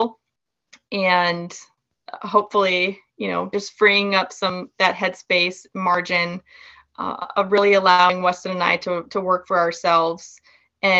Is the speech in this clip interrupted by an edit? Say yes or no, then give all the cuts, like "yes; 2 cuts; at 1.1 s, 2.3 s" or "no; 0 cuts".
no; 0 cuts